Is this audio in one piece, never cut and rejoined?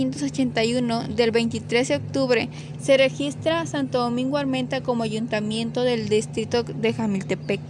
yes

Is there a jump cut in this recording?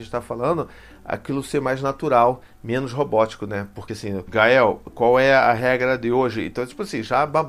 no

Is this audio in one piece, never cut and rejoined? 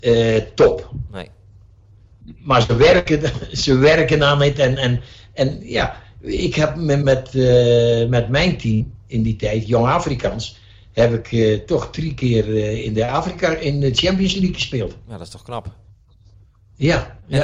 no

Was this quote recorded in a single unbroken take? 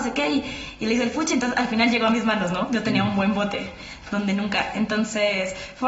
yes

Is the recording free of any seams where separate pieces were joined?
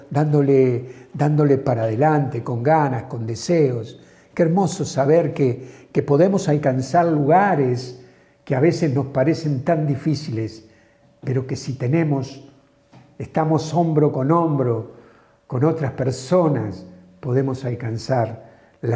yes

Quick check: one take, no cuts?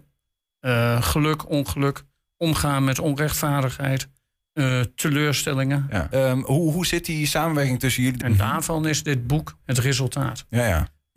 no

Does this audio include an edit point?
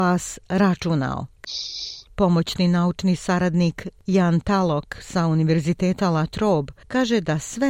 yes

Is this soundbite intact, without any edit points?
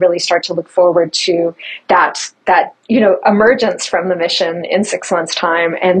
no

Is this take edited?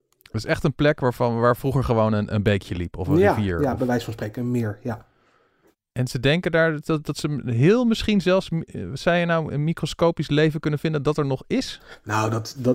no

